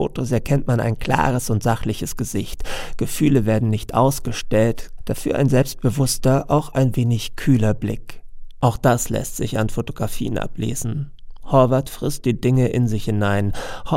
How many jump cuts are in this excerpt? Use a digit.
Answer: 2